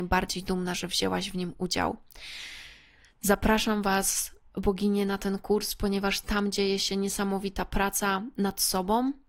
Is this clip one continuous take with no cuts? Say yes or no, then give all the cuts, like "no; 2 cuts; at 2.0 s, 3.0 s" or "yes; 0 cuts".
yes; 0 cuts